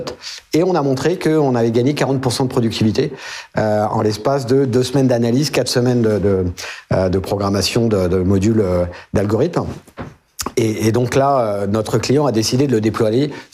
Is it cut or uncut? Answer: uncut